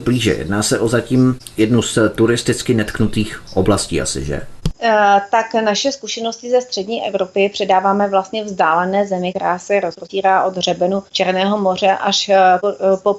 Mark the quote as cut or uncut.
uncut